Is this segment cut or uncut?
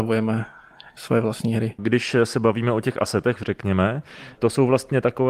cut